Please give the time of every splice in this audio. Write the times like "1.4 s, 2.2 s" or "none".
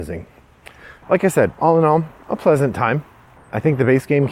1.0 s, 3.4 s